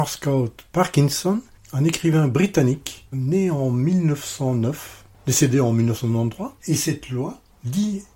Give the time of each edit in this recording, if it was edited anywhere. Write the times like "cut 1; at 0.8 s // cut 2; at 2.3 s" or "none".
cut 1; at 1.6 s // cut 2; at 3.1 s // cut 3; at 6.6 s